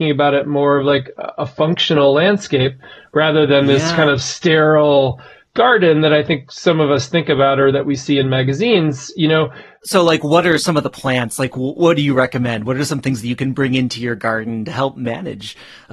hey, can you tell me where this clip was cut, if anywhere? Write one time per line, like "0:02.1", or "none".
none